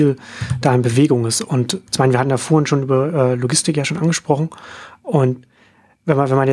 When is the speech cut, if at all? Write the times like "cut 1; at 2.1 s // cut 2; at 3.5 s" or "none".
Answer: cut 1; at 1.9 s